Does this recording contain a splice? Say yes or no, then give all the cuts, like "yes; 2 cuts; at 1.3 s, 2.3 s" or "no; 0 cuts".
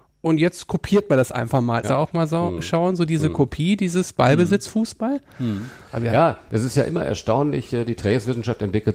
yes; 1 cut; at 1.8 s